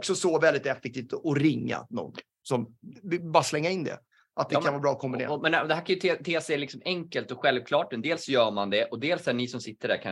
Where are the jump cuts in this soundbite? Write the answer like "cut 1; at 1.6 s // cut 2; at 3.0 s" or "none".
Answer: none